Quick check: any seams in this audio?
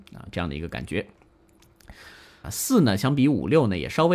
yes; 1 cut; at 2.4 s

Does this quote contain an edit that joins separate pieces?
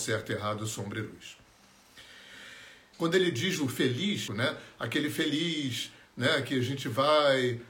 yes; 2 cuts; at 2.9 s, 4.3 s

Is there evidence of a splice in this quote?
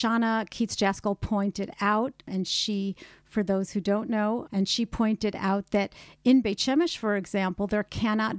yes; 1 cut; at 4.5 s

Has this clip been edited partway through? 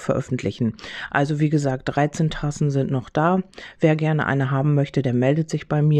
no; 0 cuts

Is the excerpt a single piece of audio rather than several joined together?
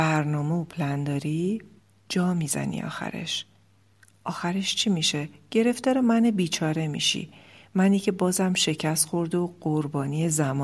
yes; 0 cuts

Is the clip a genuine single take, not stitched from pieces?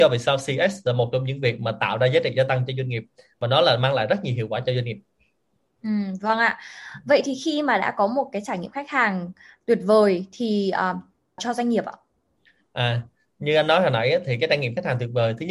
no; 1 cut; at 11.4 s

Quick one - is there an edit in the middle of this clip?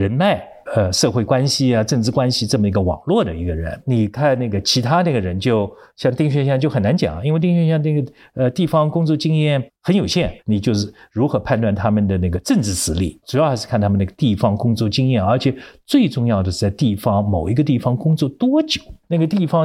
no; 0 cuts

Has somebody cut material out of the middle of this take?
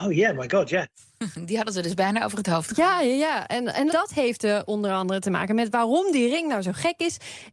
yes; 1 cut; at 3.9 s

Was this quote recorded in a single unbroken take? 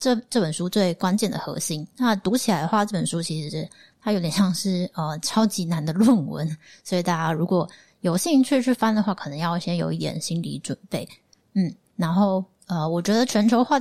yes; 0 cuts

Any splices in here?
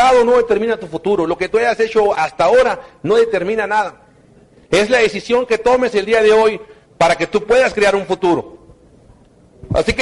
no; 0 cuts

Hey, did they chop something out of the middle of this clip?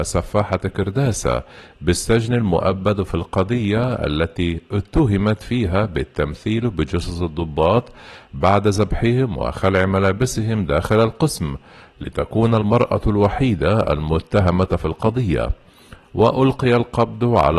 no; 0 cuts

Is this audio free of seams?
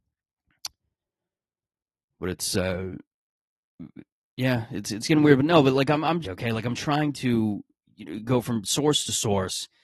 no; 1 cut; at 6.2 s

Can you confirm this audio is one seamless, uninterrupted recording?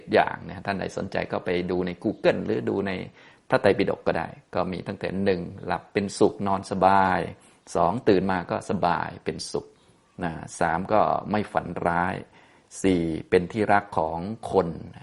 yes; 0 cuts

